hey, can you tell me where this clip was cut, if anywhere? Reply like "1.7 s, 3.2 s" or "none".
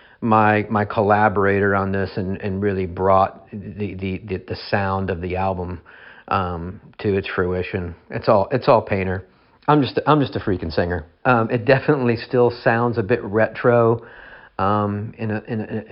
11.2 s